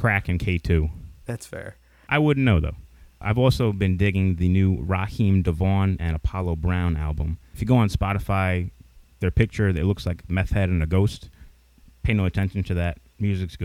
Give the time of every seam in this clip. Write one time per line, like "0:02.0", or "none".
0:07.5